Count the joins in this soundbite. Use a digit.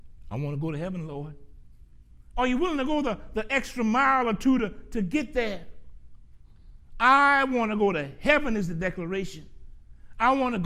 1